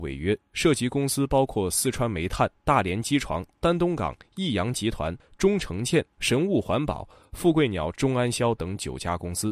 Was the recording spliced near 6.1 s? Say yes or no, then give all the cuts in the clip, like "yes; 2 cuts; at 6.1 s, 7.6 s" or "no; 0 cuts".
no; 1 cut; at 7.9 s